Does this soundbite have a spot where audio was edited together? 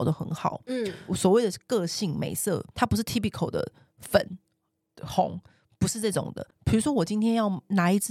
no; 0 cuts

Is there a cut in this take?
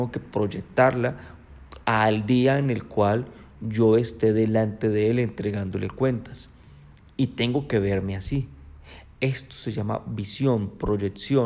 no; 0 cuts

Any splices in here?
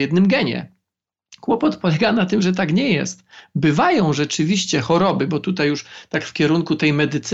no; 0 cuts

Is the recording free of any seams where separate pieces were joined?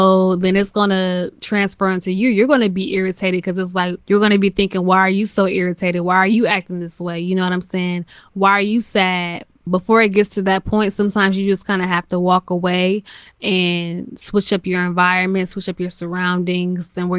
yes; 0 cuts

